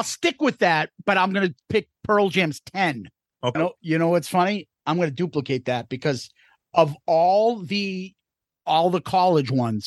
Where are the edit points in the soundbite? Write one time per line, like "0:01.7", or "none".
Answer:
0:03.5